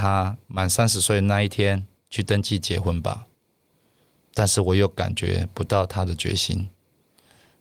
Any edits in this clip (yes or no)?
no